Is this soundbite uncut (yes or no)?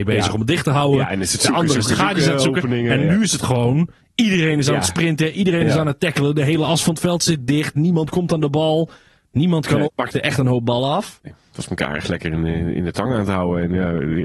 no